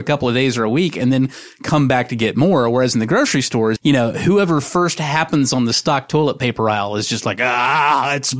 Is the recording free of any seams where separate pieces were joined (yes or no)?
no